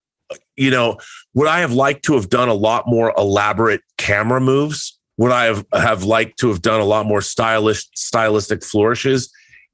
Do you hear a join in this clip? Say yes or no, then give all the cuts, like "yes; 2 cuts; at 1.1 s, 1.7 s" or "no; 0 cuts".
yes; 1 cut; at 5.1 s